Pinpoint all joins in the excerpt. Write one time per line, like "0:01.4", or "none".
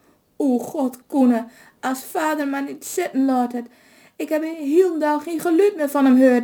none